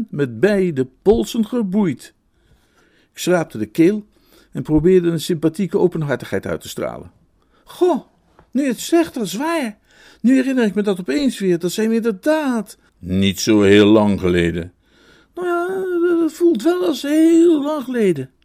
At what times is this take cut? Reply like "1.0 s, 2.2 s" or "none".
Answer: 12.9 s